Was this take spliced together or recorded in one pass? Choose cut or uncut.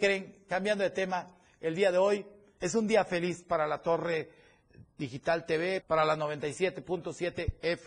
cut